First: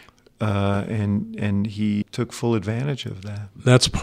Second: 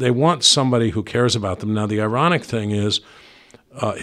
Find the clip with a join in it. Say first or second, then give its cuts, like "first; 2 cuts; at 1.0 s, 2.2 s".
first; 1 cut; at 2.0 s